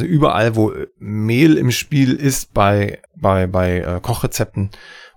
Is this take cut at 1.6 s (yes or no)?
no